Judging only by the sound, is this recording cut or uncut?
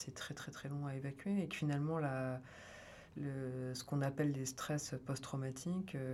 uncut